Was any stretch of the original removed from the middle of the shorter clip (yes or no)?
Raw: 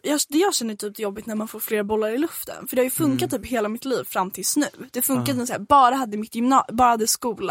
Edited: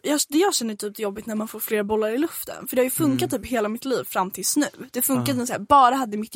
no